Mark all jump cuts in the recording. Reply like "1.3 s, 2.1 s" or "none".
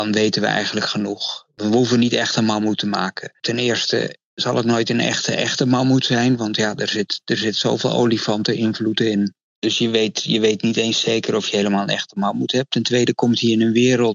none